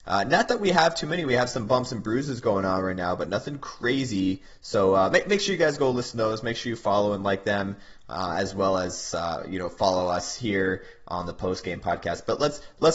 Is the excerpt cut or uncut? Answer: uncut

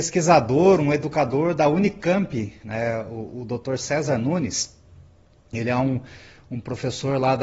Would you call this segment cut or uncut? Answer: uncut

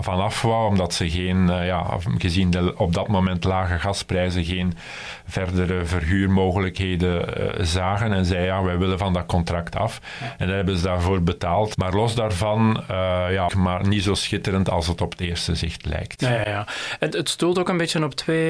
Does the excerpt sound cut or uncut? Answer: cut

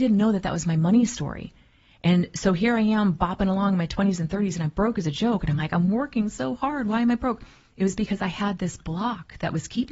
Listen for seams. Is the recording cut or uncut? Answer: uncut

